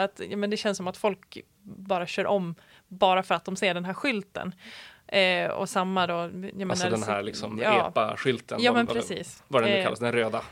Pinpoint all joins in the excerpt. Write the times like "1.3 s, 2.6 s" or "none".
none